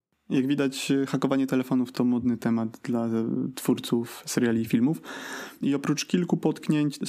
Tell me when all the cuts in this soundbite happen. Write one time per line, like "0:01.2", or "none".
0:01.9
0:05.6